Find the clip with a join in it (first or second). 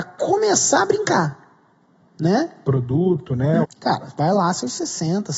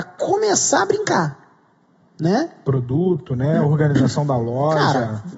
first